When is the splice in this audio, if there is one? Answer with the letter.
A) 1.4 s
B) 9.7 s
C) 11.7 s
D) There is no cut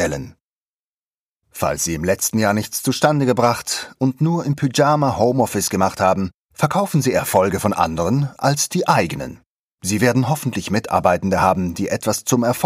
D